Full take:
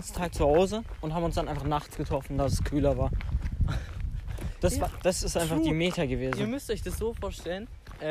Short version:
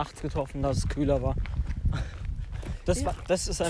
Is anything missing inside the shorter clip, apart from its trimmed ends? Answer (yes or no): no